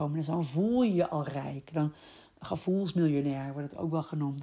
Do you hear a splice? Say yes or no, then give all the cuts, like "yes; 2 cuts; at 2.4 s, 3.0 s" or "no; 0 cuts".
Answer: no; 0 cuts